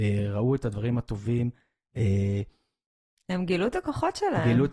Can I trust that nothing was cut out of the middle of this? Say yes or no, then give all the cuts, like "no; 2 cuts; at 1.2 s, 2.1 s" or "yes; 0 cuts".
yes; 0 cuts